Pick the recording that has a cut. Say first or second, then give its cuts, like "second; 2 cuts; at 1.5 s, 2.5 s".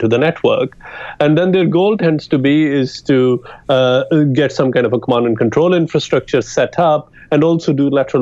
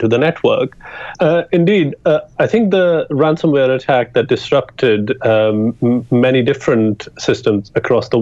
second; 1 cut; at 1.1 s